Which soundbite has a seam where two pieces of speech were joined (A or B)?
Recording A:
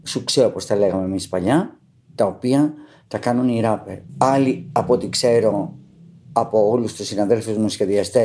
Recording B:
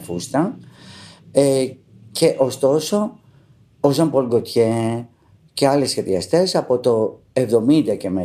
A